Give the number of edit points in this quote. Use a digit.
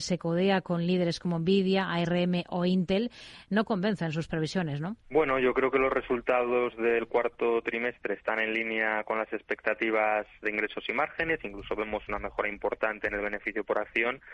1